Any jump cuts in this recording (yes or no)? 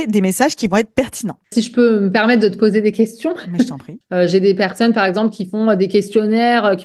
yes